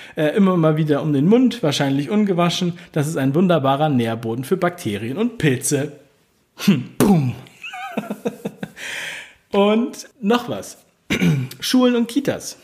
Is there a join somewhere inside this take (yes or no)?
yes